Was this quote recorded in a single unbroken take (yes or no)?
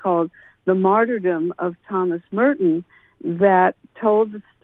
yes